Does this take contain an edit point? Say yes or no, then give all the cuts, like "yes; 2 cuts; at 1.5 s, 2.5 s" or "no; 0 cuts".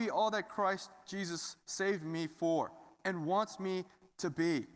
no; 0 cuts